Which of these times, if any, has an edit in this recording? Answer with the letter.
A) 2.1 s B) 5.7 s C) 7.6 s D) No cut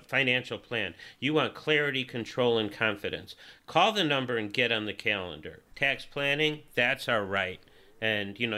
B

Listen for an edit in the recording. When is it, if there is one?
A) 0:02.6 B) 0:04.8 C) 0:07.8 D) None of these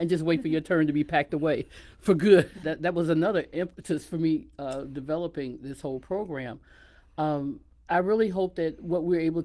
A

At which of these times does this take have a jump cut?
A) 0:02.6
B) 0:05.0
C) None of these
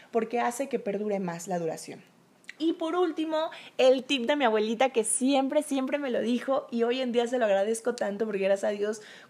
A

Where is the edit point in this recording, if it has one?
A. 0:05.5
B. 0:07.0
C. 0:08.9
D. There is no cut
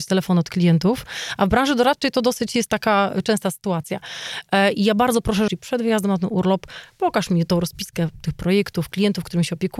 A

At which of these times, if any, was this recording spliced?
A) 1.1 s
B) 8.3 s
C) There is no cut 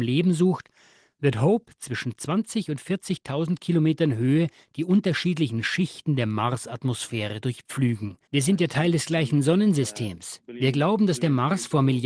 B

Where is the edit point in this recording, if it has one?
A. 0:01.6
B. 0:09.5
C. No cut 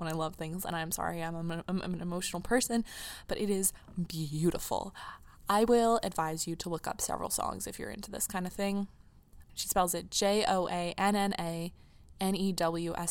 B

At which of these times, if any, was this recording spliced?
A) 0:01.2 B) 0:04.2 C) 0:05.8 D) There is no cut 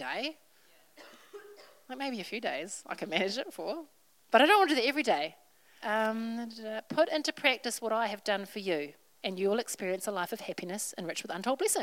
C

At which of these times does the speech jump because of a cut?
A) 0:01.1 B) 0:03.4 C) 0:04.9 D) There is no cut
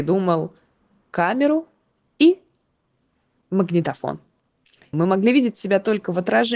C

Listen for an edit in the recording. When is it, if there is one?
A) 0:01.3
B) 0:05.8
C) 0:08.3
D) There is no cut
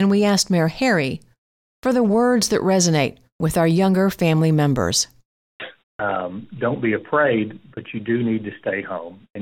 B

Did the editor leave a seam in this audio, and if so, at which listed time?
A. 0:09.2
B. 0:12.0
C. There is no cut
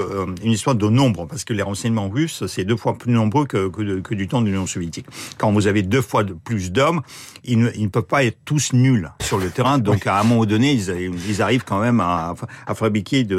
A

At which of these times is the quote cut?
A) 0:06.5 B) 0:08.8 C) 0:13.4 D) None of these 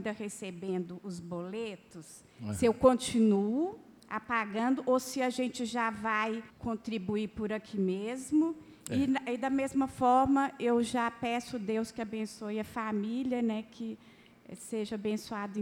A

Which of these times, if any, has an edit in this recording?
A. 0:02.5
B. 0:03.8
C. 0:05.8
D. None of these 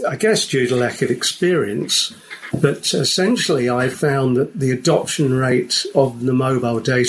A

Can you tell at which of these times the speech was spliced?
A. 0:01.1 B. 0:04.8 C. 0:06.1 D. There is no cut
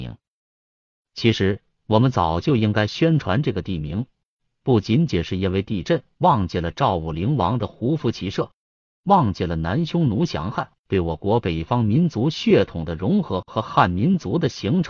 C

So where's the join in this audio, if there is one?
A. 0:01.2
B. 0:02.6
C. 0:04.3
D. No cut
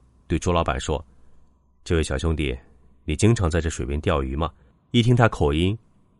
D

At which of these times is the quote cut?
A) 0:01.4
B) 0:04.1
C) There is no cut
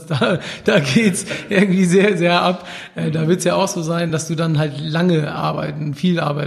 C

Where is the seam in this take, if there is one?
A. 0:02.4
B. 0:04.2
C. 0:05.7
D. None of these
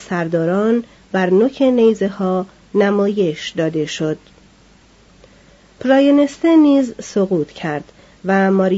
D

